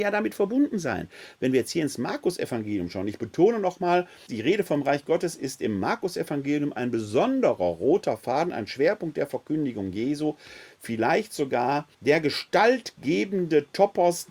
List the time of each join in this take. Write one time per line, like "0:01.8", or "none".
0:04.3
0:11.9